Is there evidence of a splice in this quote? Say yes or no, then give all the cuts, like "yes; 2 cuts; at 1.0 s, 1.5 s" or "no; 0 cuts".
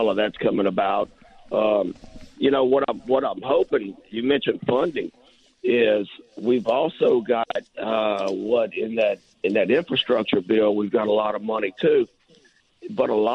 no; 0 cuts